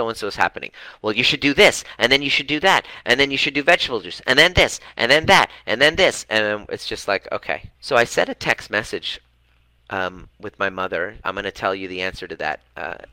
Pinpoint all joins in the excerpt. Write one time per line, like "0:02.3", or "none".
0:06.3
0:07.7
0:11.2